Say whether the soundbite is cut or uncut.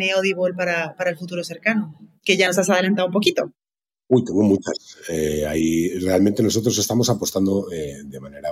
uncut